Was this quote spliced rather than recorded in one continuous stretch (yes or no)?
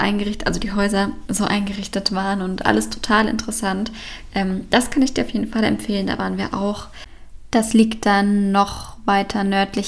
no